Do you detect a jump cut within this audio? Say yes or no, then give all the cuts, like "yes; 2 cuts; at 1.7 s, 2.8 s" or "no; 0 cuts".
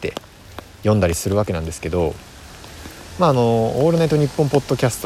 no; 0 cuts